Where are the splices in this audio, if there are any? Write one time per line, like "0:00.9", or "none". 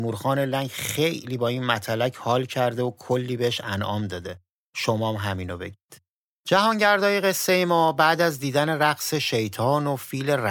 none